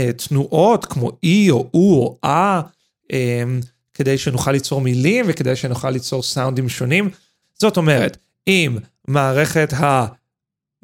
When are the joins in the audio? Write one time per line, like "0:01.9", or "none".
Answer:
0:07.4